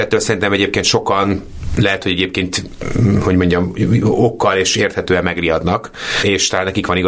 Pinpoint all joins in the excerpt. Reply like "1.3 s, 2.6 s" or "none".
none